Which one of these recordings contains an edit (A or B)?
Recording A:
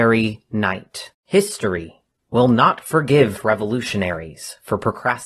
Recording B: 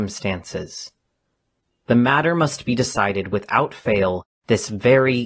A